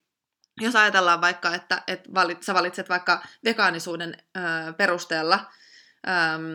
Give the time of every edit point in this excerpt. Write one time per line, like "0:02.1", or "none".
none